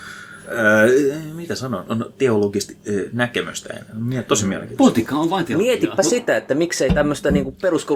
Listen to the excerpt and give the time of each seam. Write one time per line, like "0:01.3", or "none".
none